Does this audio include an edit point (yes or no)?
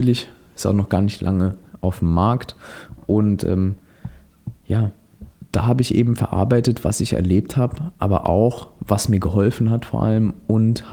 no